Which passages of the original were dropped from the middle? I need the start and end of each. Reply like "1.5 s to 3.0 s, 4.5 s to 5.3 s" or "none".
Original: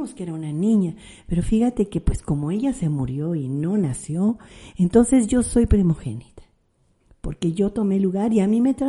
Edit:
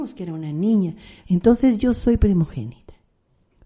1.2 s to 4.7 s